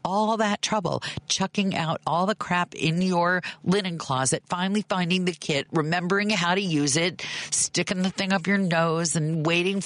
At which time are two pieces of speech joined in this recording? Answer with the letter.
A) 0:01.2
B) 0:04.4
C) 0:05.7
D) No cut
D